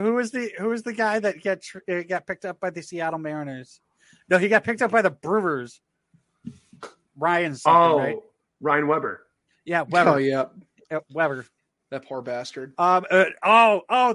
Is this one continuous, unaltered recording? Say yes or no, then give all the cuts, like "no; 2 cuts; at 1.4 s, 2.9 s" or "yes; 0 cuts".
yes; 0 cuts